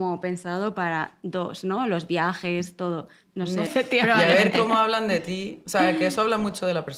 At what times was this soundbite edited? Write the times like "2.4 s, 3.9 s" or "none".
3.7 s

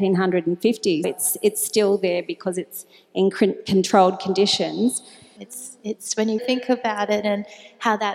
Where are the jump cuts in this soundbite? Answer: 1.0 s, 5.4 s, 6.4 s

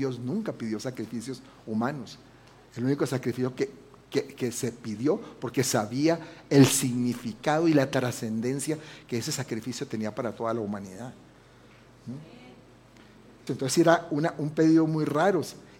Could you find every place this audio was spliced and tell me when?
2.7 s, 13.5 s

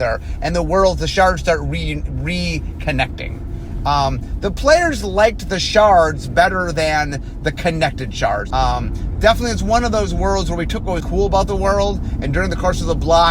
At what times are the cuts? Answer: 8.5 s, 11.0 s

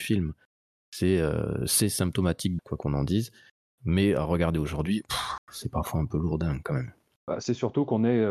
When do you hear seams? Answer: 2.6 s

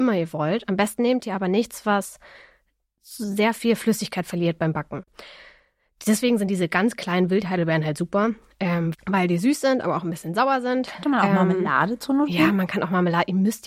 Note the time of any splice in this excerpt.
8.9 s

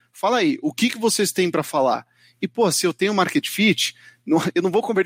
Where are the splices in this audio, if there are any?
none

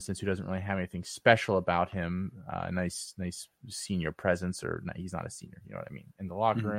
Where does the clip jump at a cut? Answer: none

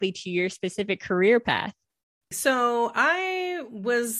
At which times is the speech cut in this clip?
2.3 s

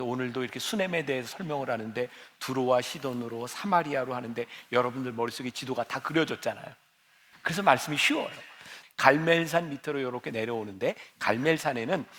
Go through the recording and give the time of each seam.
7.3 s, 8.8 s

